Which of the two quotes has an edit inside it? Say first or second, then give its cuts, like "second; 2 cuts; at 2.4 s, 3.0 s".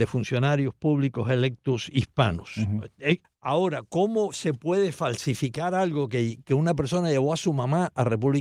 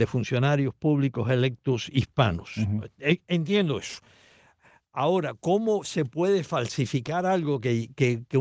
first; 2 cuts; at 3.2 s, 6.4 s